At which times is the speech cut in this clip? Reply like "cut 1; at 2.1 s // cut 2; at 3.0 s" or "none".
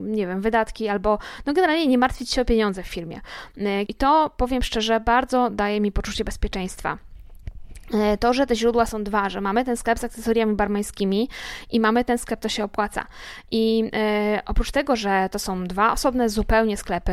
cut 1; at 3.9 s